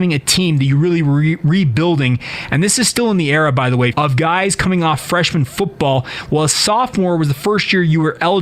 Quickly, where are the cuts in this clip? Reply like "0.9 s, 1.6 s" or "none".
3.9 s